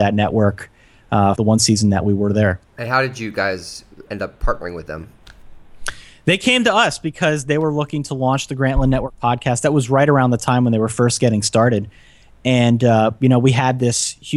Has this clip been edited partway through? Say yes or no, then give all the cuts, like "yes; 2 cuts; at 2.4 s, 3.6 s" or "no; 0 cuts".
yes; 2 cuts; at 1.3 s, 4.1 s